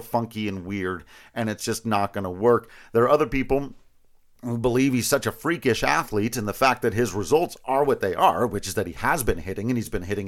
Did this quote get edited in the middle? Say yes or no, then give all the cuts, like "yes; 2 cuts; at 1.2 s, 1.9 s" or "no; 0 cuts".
no; 0 cuts